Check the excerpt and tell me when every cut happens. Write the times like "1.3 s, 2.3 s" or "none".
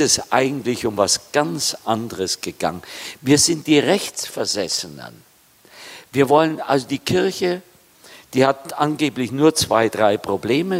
3.2 s

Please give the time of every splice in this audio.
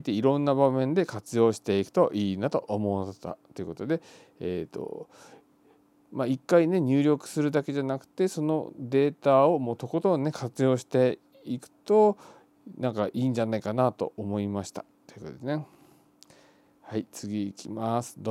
15.0 s

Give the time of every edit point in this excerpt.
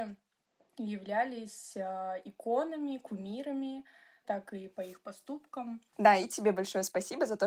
4.2 s, 5.9 s

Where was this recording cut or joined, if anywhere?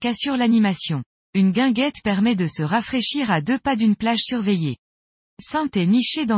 none

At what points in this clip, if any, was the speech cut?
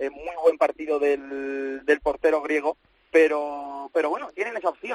none

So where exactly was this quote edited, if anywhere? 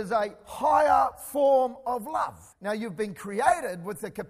2.5 s

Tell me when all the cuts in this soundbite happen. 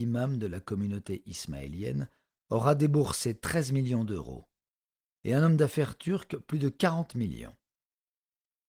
none

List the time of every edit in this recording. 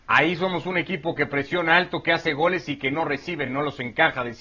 none

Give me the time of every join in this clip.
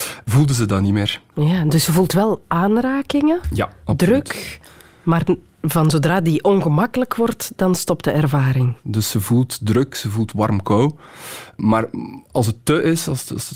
8.8 s

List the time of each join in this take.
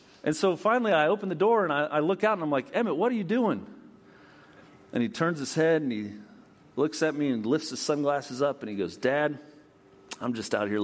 none

